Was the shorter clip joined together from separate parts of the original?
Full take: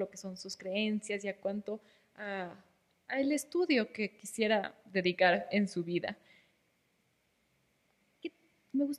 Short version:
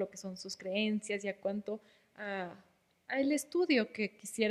no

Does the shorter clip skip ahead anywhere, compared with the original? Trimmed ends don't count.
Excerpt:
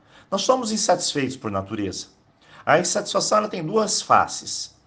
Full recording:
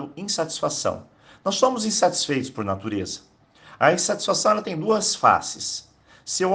no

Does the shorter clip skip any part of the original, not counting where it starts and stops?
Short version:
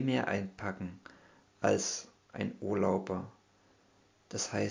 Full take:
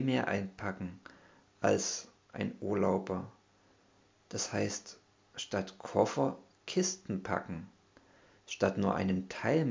no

